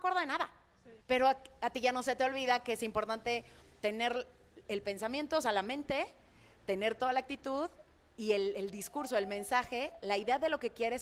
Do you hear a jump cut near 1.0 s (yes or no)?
yes